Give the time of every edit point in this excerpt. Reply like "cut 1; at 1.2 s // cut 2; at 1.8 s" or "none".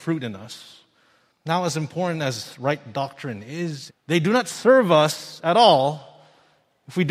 cut 1; at 1.3 s // cut 2; at 3.9 s

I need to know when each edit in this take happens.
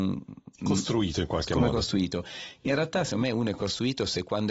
none

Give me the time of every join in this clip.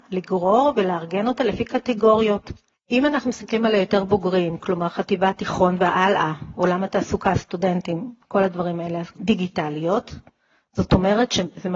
cut 1; at 2.7 s // cut 2; at 9.2 s

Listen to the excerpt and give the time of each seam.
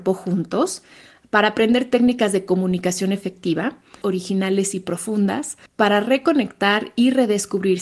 cut 1; at 4.0 s // cut 2; at 5.7 s

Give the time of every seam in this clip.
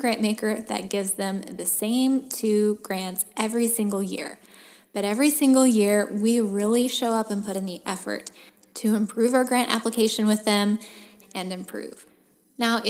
cut 1; at 11.2 s

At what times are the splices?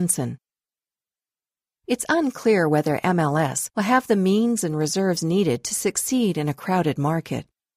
cut 1; at 3.7 s

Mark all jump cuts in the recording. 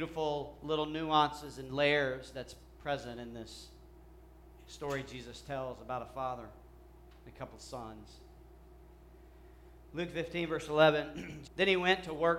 cut 1; at 11.4 s

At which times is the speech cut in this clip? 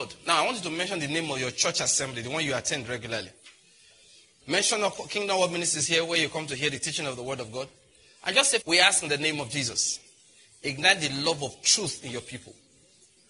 cut 1; at 8.6 s

